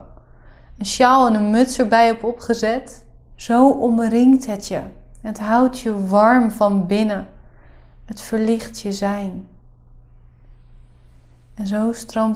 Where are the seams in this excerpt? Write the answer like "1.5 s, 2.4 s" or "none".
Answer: 3.3 s